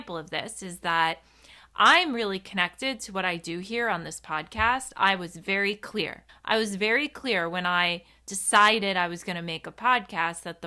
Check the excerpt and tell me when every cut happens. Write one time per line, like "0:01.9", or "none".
0:06.3